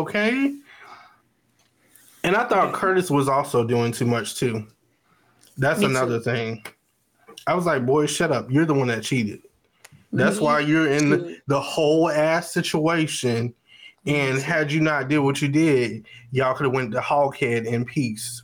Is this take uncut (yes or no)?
yes